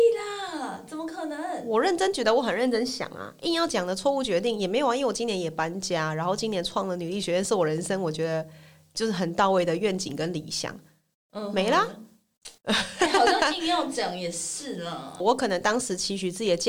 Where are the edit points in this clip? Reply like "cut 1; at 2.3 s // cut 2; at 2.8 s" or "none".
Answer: cut 1; at 12.6 s // cut 2; at 15.2 s